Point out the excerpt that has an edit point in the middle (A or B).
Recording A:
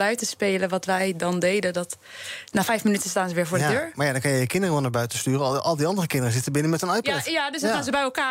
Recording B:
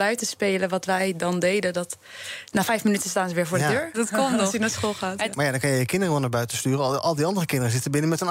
B